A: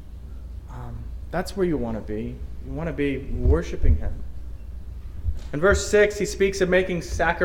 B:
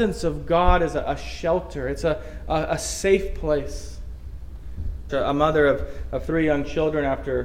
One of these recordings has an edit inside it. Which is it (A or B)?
B